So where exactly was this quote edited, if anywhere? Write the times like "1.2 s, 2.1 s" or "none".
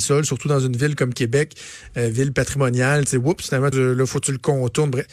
3.7 s